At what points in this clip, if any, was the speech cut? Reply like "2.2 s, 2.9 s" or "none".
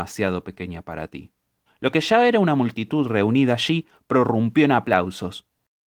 1.7 s